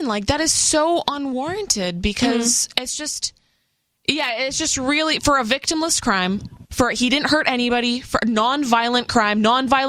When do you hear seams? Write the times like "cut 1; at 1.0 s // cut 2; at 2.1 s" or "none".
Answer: none